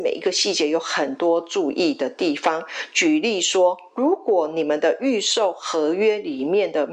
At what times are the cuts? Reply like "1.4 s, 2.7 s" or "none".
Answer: none